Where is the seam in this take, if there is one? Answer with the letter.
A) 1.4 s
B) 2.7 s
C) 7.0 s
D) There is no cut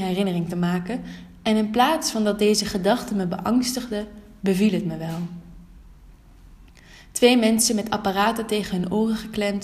D